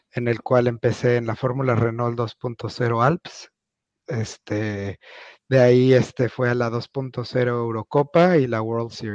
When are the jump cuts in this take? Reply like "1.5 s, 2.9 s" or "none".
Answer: none